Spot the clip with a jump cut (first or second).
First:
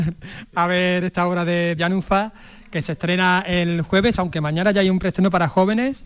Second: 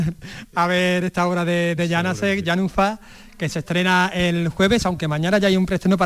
first